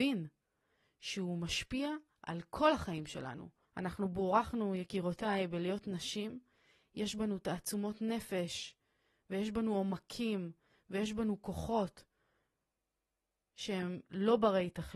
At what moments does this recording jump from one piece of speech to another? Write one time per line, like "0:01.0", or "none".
0:03.6